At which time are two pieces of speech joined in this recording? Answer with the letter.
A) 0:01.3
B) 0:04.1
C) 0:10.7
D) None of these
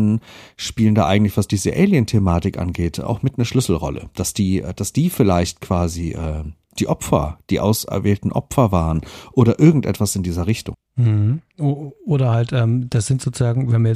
C